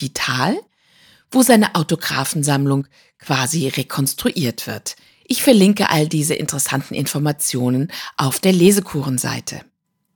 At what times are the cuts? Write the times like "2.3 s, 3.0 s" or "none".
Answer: none